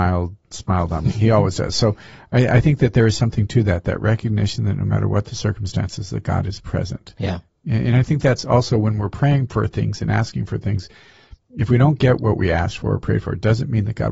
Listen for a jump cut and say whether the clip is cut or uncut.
uncut